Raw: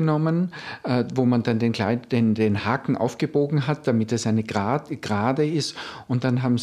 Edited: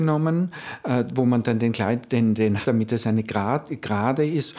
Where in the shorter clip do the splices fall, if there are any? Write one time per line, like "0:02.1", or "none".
0:02.6